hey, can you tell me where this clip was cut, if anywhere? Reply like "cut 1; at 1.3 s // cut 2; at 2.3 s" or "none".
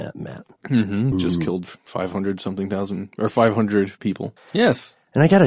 cut 1; at 1.1 s // cut 2; at 4.4 s